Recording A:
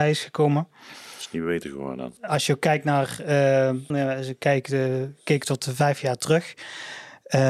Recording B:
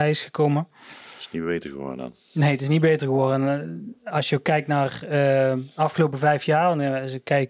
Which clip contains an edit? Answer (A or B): A